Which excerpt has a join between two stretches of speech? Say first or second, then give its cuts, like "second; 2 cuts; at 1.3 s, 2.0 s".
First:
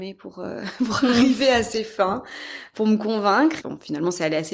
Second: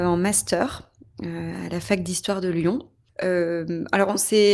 first; 1 cut; at 3.6 s